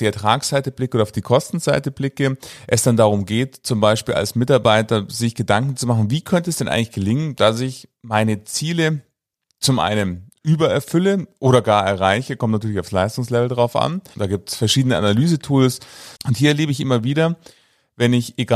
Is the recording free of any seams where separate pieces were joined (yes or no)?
no